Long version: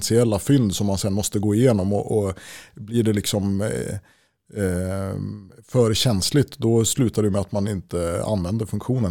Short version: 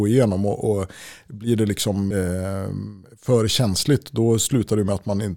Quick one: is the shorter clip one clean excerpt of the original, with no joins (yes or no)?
no